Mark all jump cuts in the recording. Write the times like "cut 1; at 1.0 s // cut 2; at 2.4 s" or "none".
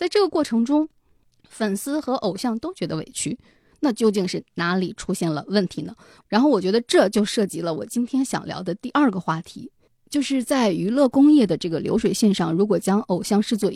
none